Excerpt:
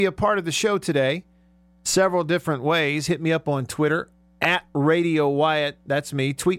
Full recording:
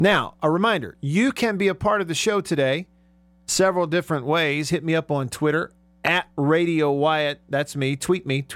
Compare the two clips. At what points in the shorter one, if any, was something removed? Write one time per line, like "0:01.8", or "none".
none

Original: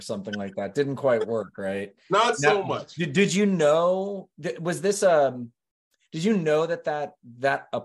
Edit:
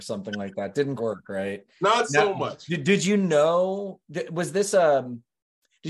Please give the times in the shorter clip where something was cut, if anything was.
0:01.0

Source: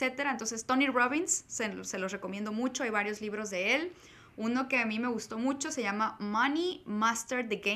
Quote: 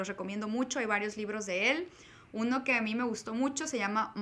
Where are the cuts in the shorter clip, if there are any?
none

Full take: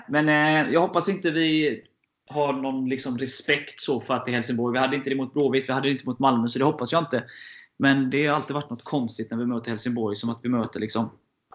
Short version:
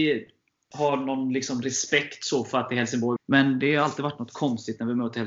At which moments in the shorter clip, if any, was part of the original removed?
0:03.2

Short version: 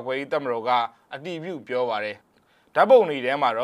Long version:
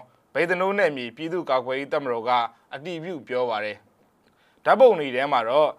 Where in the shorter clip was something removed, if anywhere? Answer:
0:02.2

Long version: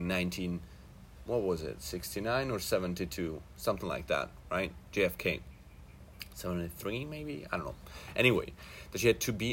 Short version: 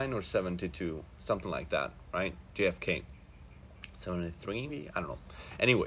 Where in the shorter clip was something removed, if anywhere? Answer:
0:04.7

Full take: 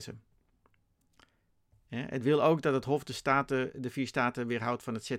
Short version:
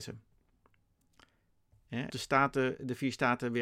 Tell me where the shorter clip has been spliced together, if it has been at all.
0:02.1

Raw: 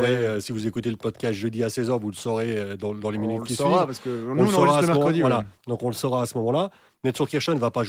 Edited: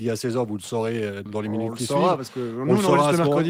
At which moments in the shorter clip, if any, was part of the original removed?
0:01.3

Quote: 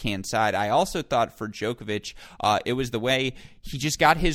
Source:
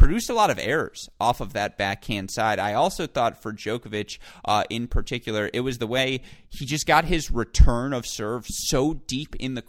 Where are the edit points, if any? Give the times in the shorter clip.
0:02.6

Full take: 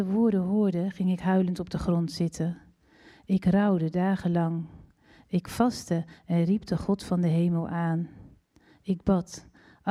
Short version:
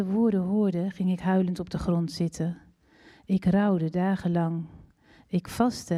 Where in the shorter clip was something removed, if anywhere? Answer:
none

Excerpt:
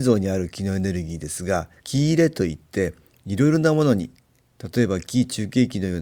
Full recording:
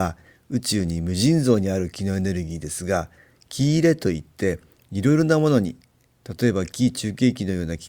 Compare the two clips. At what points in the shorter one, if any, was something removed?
0:01.8

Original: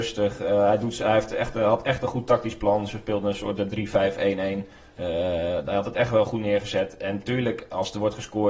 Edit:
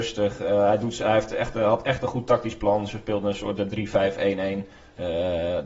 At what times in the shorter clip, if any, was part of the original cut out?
none

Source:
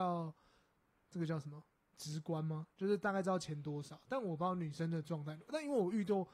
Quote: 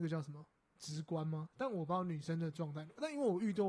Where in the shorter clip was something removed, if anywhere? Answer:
0:01.5

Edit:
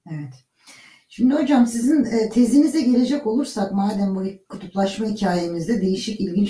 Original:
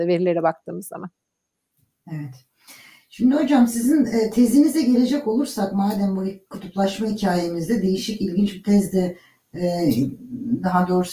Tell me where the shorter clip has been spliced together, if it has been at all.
none

